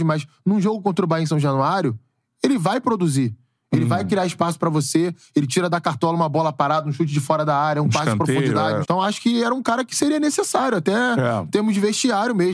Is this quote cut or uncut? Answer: cut